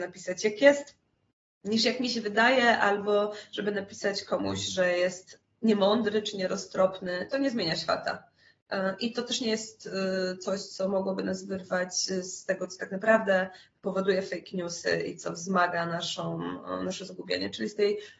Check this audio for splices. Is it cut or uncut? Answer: uncut